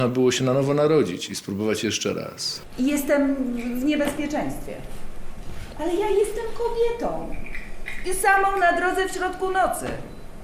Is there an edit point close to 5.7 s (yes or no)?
yes